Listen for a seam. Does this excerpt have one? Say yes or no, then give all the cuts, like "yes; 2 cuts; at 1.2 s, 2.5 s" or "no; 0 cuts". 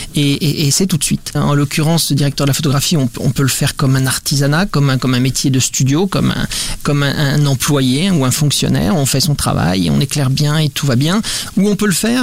yes; 1 cut; at 1.3 s